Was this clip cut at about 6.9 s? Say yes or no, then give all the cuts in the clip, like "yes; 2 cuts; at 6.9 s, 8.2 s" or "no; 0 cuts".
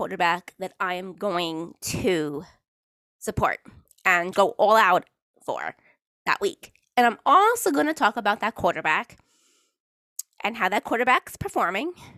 no; 1 cut; at 4.3 s